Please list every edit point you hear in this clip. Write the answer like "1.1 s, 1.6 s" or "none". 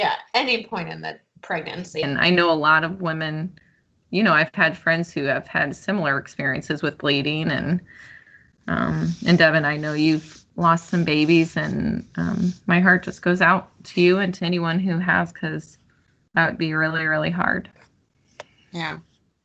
2.0 s